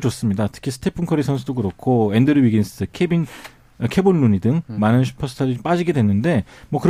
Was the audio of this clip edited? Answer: no; 0 cuts

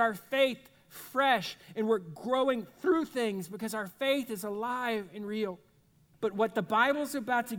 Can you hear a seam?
yes; 1 cut; at 6.1 s

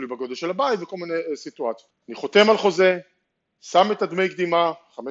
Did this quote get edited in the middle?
yes; 1 cut; at 1.9 s

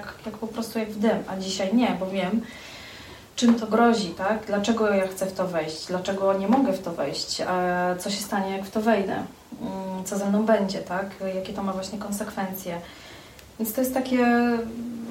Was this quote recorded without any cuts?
yes; 0 cuts

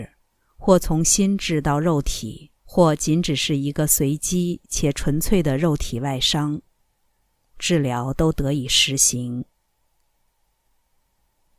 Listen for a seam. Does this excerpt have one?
yes; 1 cut; at 2.6 s

